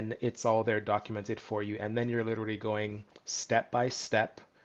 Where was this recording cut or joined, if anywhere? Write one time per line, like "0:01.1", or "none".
none